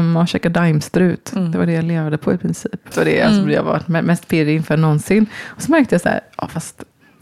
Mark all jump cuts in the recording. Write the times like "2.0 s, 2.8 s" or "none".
2.9 s